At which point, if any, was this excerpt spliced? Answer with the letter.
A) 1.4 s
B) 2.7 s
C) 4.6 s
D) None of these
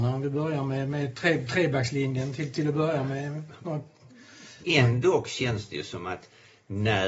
C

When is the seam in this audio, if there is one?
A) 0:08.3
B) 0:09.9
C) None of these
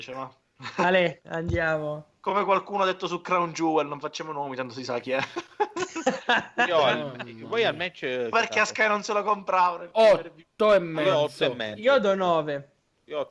A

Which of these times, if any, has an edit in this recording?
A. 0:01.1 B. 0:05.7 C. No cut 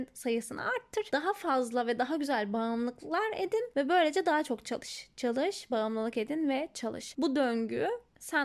B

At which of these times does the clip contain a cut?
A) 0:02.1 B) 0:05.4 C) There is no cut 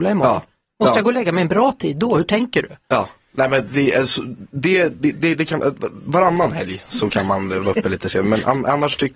C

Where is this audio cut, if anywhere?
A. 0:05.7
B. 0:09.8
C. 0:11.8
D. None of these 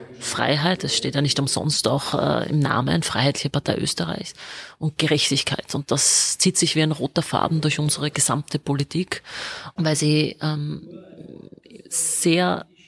B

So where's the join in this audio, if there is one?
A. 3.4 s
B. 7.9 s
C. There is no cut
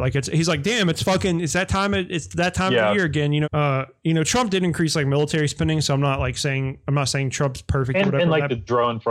A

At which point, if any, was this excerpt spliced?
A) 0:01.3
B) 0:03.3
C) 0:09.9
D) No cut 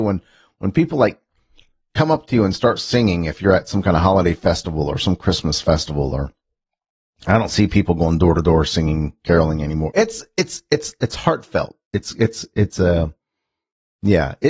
C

